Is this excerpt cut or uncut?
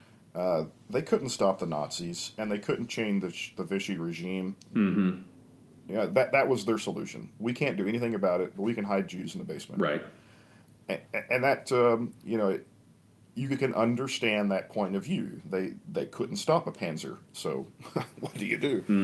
cut